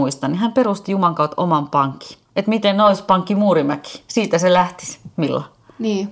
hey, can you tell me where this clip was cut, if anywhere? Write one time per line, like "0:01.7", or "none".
0:02.3